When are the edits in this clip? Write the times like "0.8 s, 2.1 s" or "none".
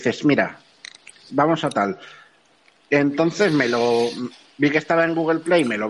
1.3 s